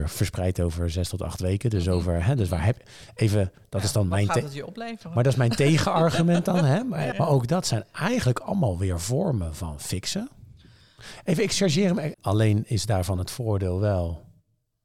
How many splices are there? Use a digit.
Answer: 2